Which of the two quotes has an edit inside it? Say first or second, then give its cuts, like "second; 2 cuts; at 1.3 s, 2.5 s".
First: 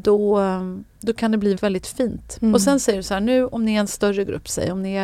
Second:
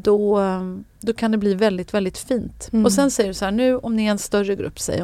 first; 1 cut; at 1.6 s